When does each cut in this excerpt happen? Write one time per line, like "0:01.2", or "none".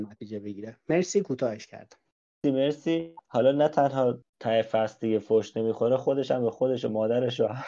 0:02.4

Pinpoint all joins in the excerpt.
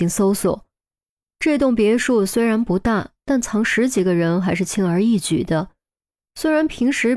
0:06.2

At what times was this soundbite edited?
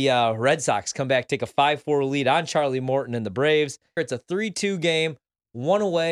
0:04.0

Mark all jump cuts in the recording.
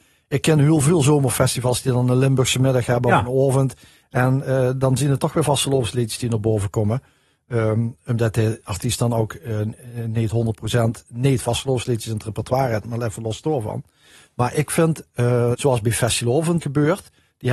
0:15.5
0:16.6

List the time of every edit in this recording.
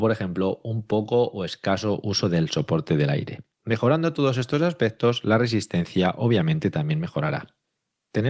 none

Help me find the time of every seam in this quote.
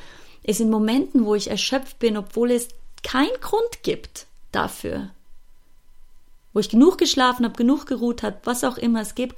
none

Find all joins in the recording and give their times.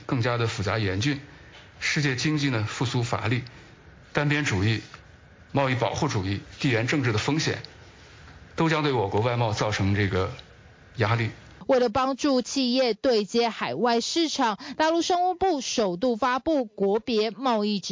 none

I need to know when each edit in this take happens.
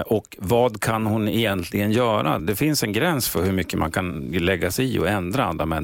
0:02.4

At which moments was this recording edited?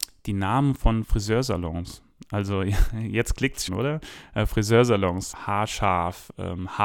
0:03.7
0:05.3

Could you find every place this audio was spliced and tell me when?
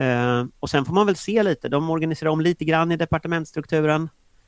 none

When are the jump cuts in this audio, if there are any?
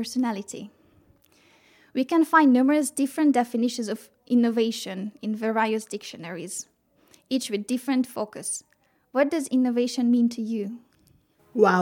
none

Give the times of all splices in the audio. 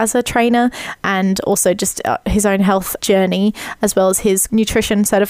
none

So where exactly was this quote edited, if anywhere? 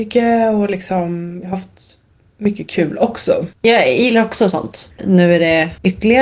0:03.5
0:04.9

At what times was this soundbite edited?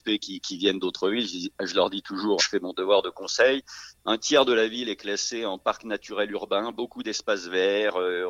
0:02.4
0:03.9

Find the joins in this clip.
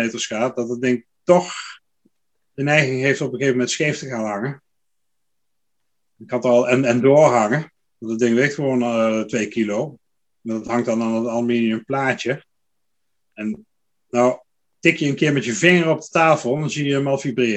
none

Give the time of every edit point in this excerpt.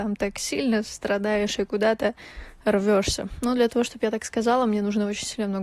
none

